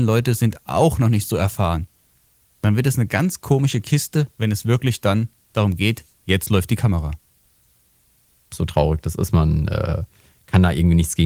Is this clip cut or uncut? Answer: cut